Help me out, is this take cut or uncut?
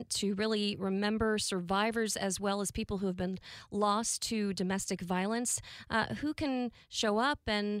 uncut